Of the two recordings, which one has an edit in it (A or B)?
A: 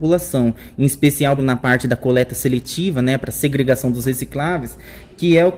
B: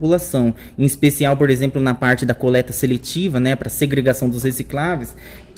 A